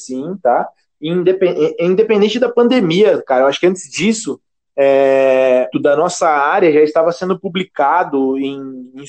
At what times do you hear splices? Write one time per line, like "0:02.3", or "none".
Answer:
0:05.7